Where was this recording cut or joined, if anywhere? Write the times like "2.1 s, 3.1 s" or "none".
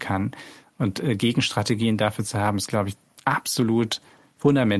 none